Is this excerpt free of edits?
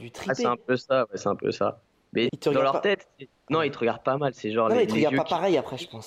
no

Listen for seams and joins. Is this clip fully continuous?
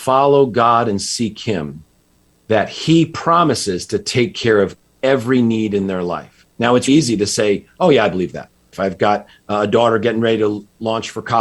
no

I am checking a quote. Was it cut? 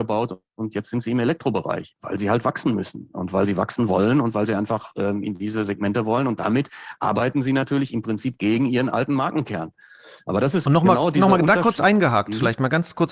no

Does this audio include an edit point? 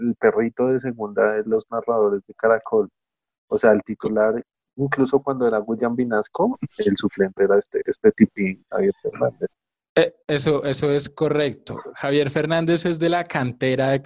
no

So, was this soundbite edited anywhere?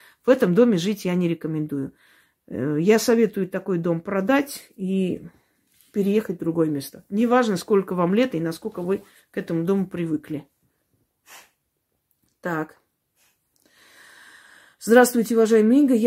no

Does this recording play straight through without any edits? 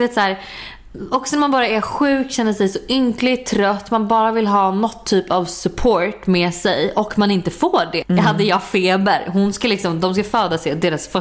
no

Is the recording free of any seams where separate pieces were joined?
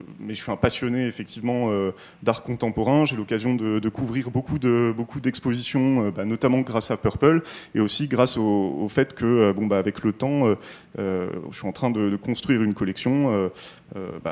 yes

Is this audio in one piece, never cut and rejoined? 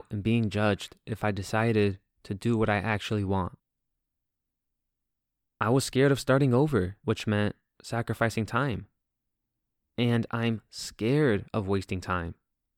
no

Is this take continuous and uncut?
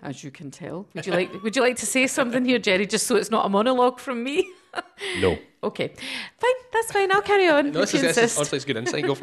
no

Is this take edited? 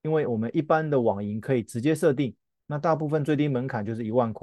no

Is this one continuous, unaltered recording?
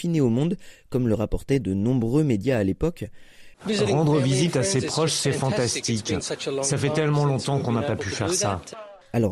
no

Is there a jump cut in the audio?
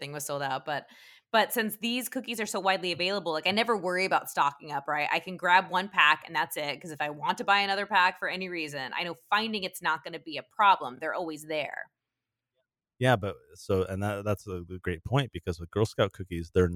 no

